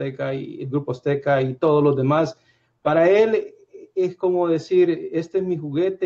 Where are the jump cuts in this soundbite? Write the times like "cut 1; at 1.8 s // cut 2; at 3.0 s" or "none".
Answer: none